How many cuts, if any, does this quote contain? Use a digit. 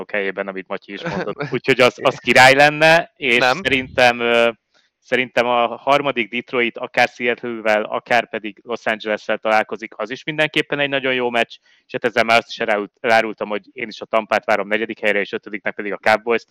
1